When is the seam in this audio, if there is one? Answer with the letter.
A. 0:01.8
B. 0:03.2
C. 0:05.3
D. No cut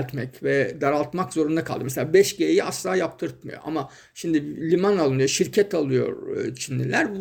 D